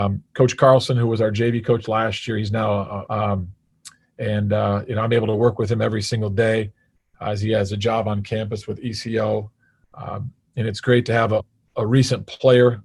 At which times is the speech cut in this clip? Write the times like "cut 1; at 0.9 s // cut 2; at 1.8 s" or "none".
cut 1; at 3.1 s // cut 2; at 11.4 s